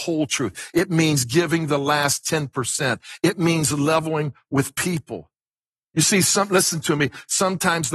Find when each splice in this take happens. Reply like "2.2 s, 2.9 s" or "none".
none